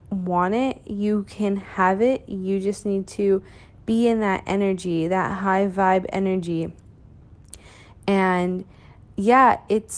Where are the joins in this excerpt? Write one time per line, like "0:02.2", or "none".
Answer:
none